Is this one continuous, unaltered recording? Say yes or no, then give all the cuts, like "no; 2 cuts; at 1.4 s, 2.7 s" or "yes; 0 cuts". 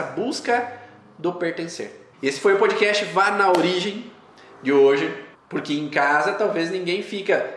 no; 2 cuts; at 2.1 s, 5.3 s